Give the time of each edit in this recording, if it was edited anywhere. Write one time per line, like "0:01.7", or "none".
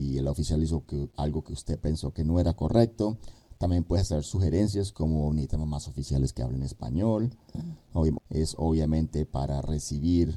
0:08.2

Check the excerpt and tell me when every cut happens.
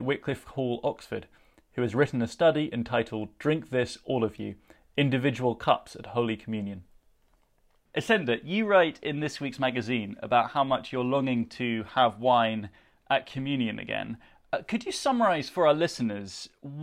none

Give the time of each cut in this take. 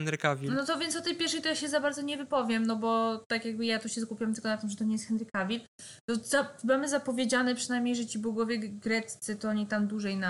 none

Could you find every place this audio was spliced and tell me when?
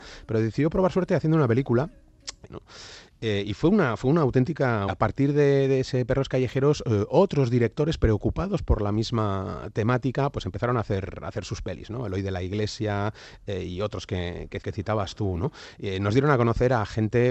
0:02.5
0:04.9
0:14.6

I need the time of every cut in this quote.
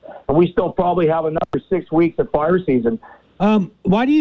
0:03.2

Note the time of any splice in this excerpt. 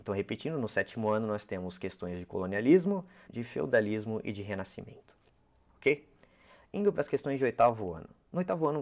0:03.3

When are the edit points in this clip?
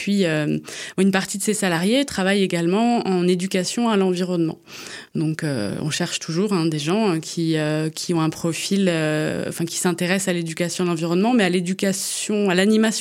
none

